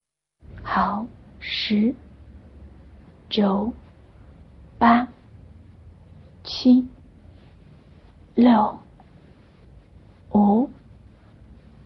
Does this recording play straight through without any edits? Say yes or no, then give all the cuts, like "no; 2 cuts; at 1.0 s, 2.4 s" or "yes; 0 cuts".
yes; 0 cuts